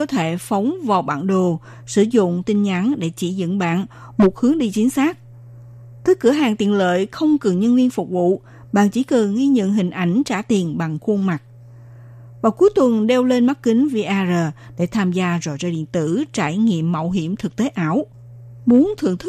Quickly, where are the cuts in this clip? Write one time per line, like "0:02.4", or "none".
none